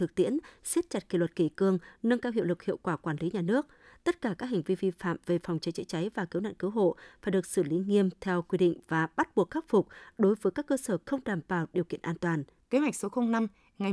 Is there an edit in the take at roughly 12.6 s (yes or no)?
yes